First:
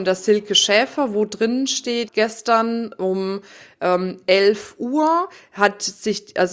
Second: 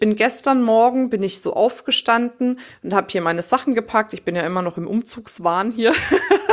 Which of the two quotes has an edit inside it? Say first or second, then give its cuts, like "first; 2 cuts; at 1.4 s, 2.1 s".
first; 1 cut; at 2.1 s